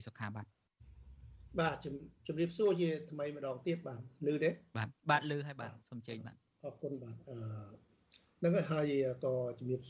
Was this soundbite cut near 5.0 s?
yes; 1 cut; at 5.0 s

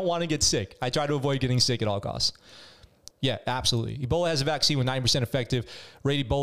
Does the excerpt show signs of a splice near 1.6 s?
no; 1 cut; at 3.1 s

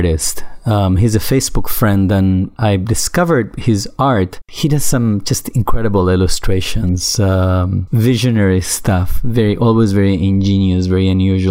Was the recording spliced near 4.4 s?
no; 0 cuts

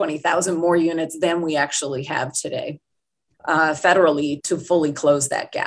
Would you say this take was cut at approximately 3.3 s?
yes; 2 cuts; at 3.3 s, 4.4 s

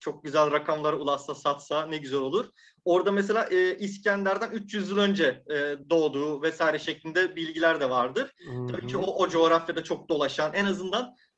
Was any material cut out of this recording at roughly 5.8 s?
yes; 1 cut; at 5.8 s

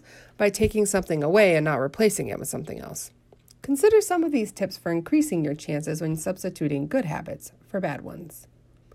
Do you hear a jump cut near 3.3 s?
no; 0 cuts

